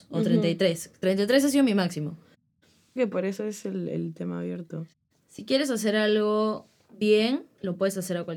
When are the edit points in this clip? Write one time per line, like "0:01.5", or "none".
0:03.0